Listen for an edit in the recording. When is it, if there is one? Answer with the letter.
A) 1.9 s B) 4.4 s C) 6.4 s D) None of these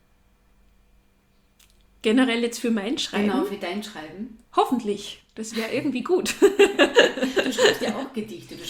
B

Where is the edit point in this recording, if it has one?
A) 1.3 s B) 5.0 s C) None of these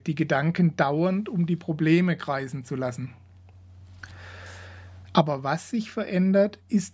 B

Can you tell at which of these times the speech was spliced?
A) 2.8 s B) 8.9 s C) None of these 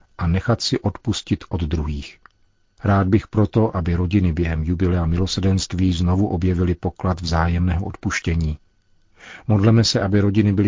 A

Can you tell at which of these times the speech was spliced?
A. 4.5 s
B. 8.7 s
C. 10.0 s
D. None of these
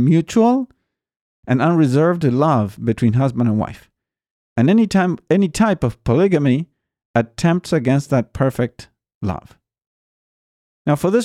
A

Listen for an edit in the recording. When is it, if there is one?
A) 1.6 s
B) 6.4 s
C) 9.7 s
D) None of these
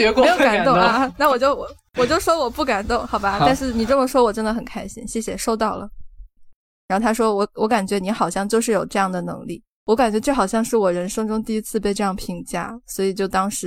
B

